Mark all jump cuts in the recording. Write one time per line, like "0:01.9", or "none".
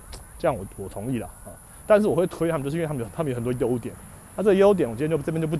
0:01.8